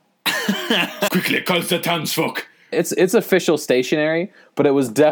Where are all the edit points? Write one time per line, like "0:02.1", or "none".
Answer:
0:01.1
0:02.7